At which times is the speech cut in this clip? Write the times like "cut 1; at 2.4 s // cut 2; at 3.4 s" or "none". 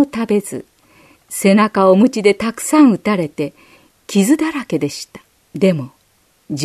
cut 1; at 5.4 s